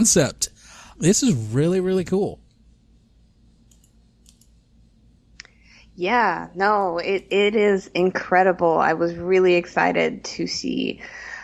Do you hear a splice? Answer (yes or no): yes